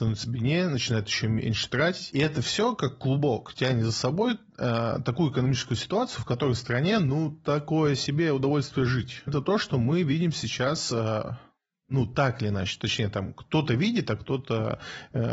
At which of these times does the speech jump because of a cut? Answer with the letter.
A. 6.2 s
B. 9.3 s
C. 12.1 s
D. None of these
B